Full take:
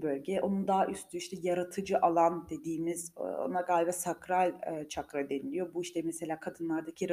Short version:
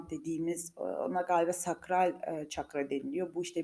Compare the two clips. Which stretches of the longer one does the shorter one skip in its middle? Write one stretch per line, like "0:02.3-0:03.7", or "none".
none